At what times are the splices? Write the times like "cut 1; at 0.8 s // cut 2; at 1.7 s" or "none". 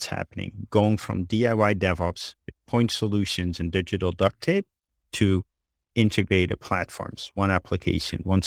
none